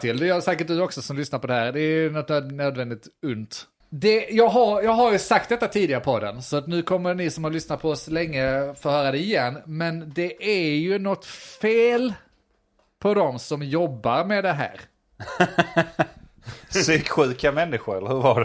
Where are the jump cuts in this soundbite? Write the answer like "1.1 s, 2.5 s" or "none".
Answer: 3.8 s